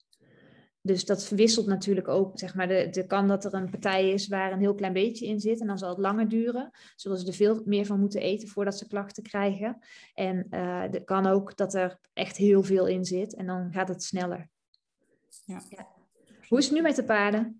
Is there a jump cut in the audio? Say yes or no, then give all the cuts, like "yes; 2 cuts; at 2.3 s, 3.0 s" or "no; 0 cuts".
yes; 1 cut; at 2.3 s